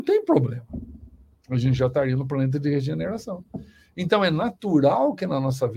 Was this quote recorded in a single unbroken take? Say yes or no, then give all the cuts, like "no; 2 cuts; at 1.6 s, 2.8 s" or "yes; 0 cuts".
no; 1 cut; at 1.4 s